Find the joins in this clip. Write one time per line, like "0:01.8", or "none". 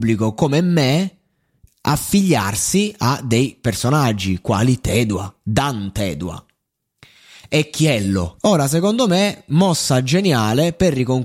0:08.4